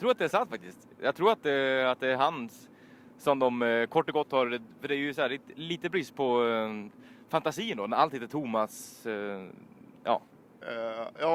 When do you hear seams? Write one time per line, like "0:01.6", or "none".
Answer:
none